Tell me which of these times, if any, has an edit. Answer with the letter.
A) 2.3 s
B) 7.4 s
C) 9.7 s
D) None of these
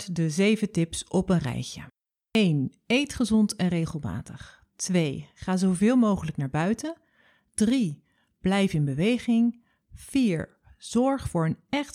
D